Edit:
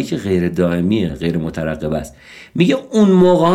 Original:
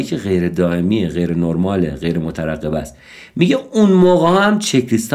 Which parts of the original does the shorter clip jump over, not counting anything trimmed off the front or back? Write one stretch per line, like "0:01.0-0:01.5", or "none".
0:01.1-0:01.9